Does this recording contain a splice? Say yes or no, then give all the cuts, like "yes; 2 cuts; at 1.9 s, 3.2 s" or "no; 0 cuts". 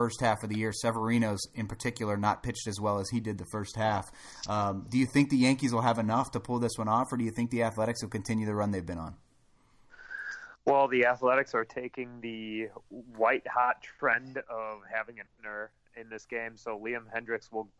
yes; 1 cut; at 15.3 s